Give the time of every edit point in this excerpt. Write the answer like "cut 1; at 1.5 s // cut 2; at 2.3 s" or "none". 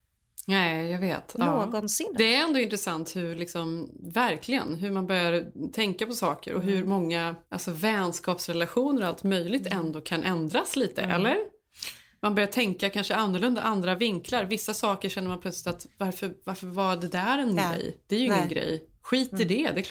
cut 1; at 2.1 s // cut 2; at 7.4 s